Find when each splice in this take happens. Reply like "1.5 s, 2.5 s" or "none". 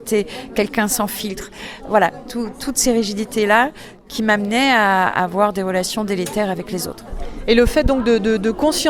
none